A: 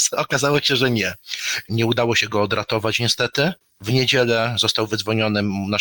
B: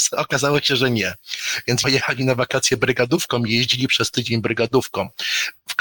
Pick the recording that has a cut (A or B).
A